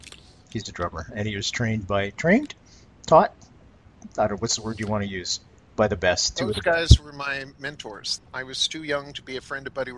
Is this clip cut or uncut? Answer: cut